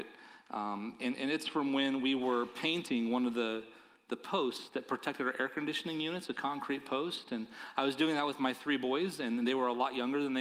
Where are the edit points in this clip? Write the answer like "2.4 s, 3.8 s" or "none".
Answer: none